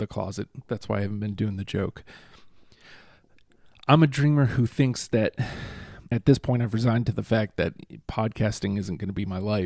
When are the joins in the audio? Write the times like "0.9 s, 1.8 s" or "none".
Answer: 6.1 s